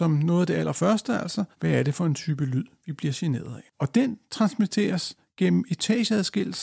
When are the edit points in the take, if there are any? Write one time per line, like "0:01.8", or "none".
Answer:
0:01.5
0:03.7